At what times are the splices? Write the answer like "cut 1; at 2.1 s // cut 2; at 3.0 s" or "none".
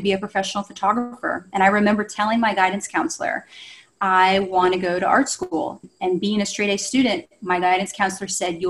none